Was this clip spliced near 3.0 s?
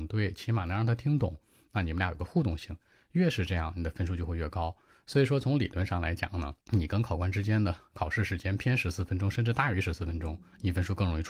no; 1 cut; at 6.6 s

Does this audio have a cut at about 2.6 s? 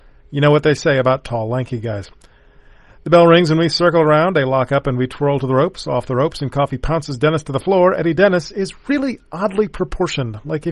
no; 0 cuts

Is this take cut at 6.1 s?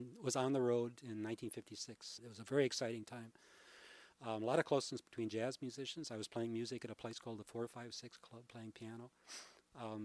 no; 1 cut; at 2.2 s

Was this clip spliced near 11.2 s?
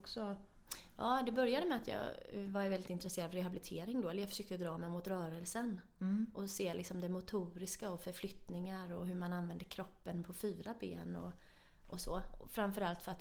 no; 0 cuts

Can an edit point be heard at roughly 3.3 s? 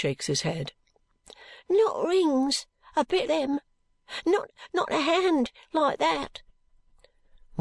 yes; 1 cut; at 3.3 s

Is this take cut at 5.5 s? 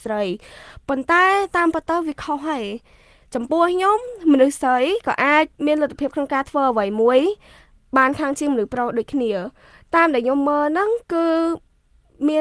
yes; 1 cut; at 5.5 s

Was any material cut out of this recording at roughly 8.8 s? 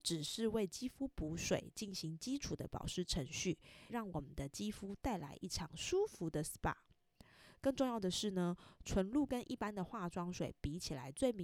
no; 1 cut; at 3.9 s

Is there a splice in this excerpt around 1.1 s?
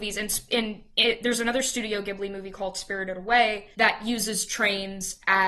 no; 1 cut; at 3.7 s

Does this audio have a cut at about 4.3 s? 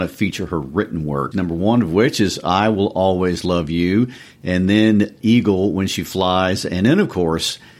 no; 1 cut; at 1.3 s

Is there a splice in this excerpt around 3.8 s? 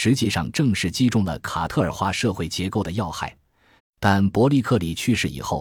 yes; 1 cut; at 3.8 s

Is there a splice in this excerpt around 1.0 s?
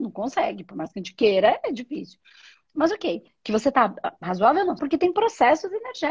no; 2 cuts; at 3.3 s, 4.8 s

